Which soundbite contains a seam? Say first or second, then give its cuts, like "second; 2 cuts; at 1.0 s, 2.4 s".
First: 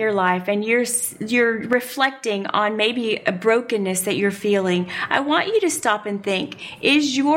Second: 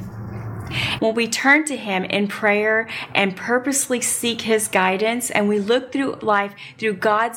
second; 1 cut; at 1.0 s